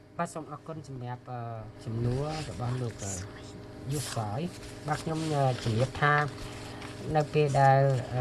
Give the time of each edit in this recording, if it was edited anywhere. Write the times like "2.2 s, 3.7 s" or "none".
1.8 s